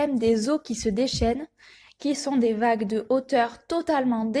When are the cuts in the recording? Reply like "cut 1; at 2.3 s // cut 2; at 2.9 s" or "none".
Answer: cut 1; at 1.9 s